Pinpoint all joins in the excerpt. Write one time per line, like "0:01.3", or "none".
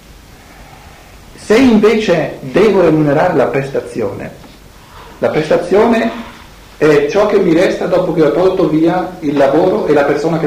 none